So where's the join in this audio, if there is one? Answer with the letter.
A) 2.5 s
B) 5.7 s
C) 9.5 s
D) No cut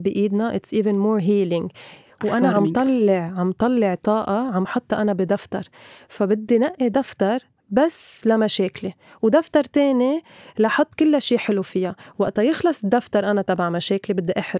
D